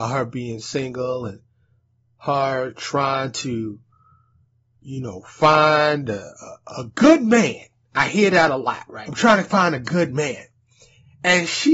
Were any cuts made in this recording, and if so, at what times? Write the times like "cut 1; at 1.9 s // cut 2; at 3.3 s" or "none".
cut 1; at 9.0 s